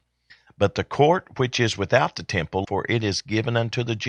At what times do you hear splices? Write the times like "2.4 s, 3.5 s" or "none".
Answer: 2.6 s